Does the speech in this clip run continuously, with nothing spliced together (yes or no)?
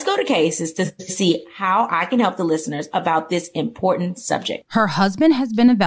no